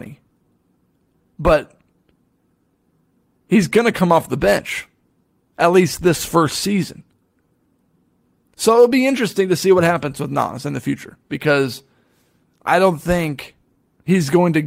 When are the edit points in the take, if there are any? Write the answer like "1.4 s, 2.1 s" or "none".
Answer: 1.3 s